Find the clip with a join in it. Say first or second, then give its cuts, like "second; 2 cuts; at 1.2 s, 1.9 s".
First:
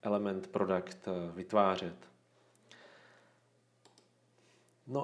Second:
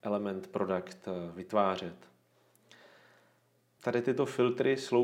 second; 1 cut; at 3.8 s